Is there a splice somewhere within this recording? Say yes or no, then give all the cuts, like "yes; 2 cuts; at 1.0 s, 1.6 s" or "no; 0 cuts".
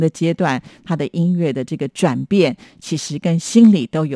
no; 0 cuts